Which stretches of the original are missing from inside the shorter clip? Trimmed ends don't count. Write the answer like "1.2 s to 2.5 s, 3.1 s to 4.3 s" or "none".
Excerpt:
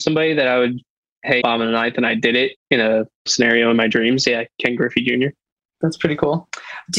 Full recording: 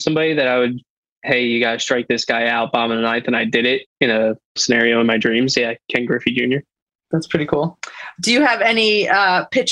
1.4 s to 2.7 s